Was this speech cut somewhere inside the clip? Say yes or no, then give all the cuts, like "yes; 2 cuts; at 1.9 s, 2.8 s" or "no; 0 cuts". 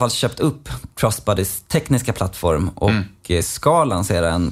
no; 0 cuts